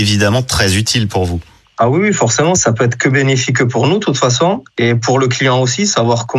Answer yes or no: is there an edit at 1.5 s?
no